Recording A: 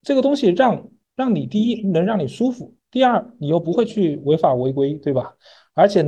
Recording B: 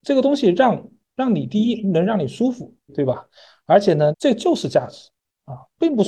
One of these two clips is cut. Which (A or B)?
B